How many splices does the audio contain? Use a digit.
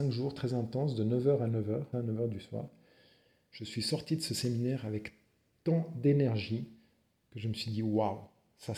1